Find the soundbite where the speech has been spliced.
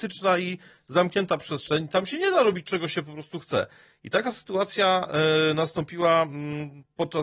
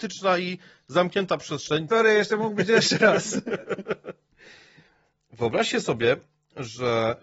second; 1 cut; at 1.9 s

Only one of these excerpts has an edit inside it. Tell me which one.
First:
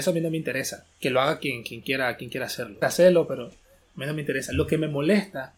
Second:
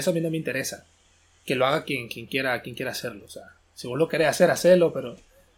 first; 2 cuts; at 0.9 s, 2.8 s

